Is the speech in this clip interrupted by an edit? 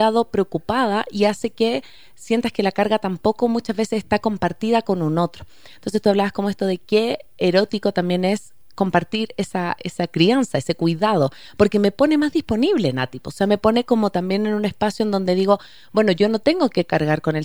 no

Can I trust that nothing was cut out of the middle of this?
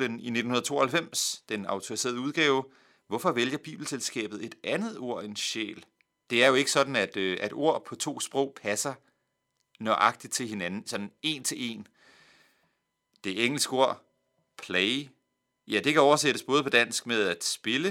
no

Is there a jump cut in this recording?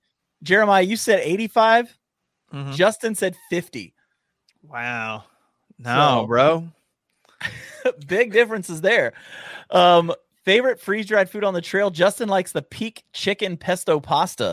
no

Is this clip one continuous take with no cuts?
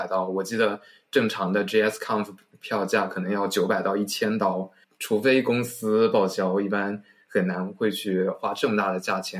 no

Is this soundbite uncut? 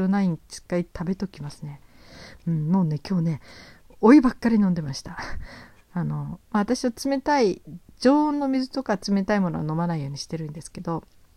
yes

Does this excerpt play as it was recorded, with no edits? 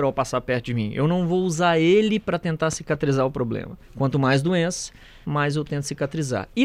no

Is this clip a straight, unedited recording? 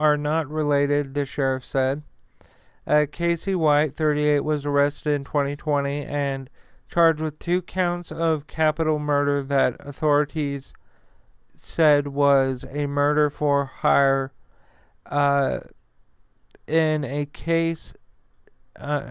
yes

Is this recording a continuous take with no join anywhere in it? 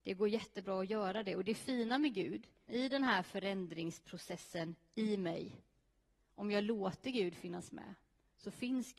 no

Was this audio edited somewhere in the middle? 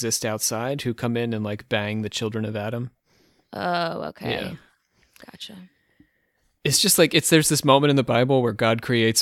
no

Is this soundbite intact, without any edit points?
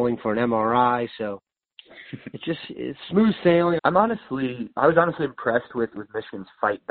no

